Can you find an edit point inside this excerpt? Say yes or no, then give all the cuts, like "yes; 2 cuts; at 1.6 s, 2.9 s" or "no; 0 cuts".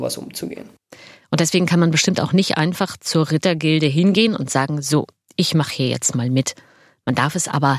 no; 0 cuts